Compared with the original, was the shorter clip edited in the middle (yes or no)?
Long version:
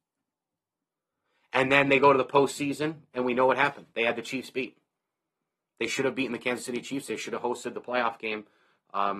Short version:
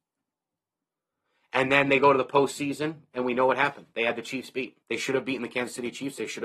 yes